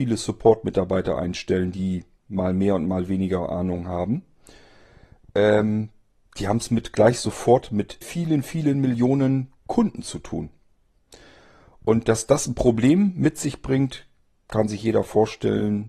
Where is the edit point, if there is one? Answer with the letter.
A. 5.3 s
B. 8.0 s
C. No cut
B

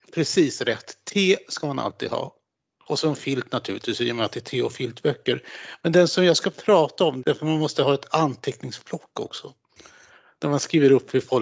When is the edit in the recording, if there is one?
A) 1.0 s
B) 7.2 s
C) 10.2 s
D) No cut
B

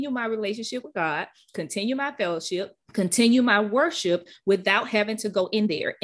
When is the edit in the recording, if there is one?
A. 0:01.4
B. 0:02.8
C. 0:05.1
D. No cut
B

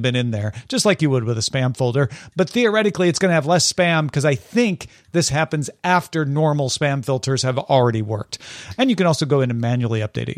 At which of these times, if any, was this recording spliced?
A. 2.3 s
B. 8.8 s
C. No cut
B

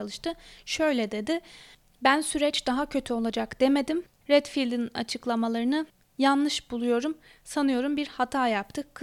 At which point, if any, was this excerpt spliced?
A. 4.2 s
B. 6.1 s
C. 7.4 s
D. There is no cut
A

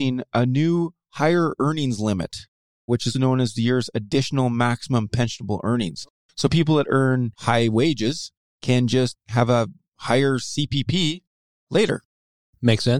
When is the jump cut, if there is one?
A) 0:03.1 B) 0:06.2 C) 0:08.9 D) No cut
A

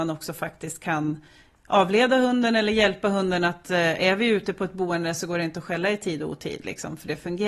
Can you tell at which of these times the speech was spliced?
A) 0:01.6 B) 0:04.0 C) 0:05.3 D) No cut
D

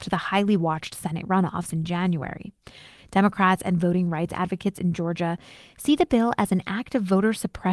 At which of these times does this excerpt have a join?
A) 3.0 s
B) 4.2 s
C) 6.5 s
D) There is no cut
A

